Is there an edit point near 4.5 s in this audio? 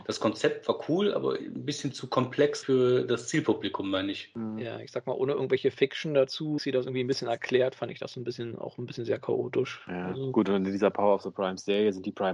no; 2 cuts; at 2.6 s, 6.6 s

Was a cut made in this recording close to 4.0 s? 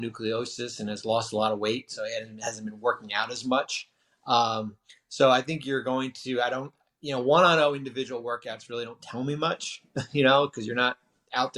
no; 0 cuts

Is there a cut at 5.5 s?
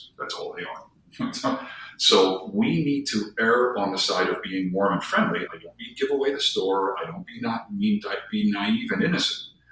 yes; 1 cut; at 5.5 s

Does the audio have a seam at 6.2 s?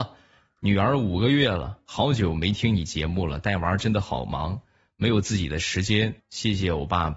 yes; 1 cut; at 6.2 s

